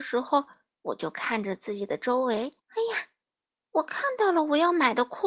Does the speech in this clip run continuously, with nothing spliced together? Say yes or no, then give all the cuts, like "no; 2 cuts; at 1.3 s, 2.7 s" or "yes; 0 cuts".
no; 1 cut; at 2.6 s